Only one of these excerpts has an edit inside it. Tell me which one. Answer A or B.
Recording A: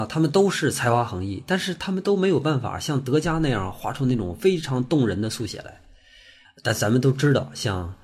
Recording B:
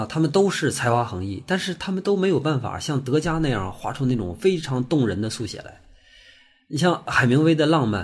A